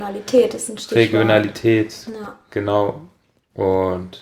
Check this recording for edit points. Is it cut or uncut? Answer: uncut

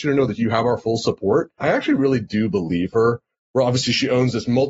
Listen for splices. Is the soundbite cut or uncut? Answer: cut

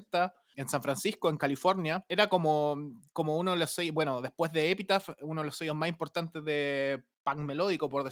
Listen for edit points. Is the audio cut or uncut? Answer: uncut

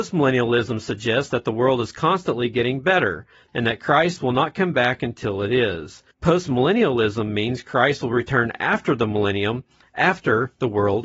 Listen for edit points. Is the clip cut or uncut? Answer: cut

